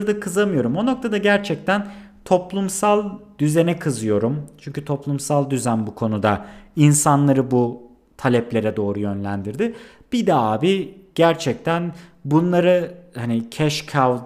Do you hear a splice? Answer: no; 0 cuts

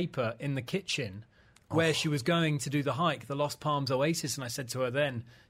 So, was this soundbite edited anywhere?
no; 0 cuts

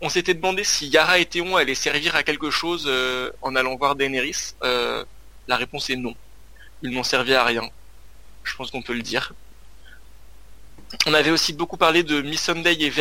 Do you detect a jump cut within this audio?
no; 0 cuts

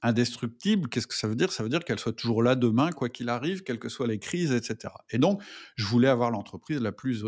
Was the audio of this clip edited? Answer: no; 0 cuts

